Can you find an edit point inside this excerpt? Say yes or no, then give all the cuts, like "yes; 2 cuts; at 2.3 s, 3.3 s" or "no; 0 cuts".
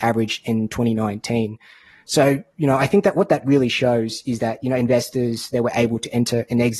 no; 0 cuts